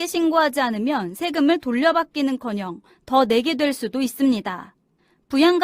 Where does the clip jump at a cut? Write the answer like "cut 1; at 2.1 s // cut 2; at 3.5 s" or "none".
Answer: none